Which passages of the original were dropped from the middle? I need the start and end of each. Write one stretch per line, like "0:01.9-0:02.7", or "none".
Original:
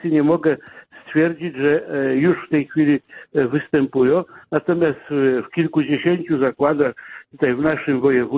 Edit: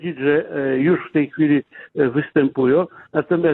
none